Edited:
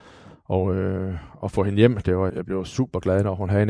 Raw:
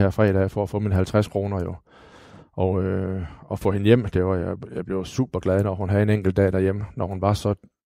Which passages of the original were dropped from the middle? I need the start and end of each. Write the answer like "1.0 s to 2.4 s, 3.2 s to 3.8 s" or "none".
4.4 s to 4.7 s